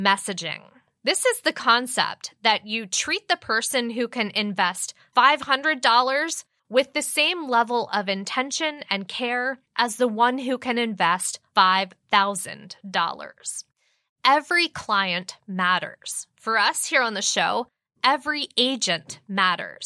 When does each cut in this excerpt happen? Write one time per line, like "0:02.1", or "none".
none